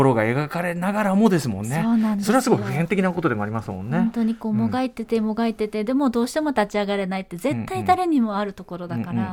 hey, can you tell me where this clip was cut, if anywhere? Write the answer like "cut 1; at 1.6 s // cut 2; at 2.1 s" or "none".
none